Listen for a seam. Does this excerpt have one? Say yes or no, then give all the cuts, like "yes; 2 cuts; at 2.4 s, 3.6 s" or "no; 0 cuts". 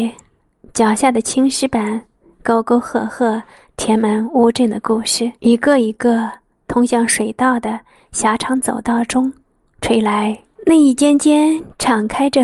yes; 2 cuts; at 5.4 s, 10.5 s